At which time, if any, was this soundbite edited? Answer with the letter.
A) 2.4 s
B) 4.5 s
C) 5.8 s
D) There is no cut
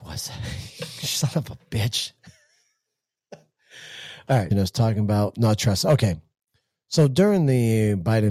B